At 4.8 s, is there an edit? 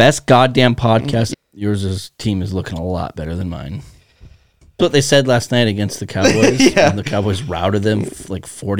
yes; 2 cuts; at 1.3 s, 4.8 s

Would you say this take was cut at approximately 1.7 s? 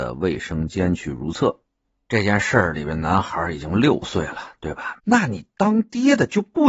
no; 1 cut; at 5.0 s

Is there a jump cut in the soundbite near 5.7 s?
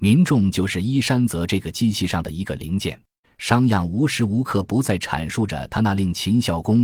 no; 1 cut; at 3.2 s

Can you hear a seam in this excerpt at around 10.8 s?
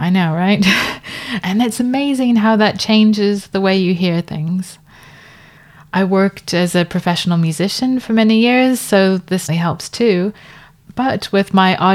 no; 1 cut; at 9.5 s

